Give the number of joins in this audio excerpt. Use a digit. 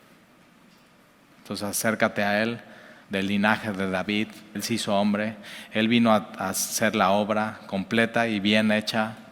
3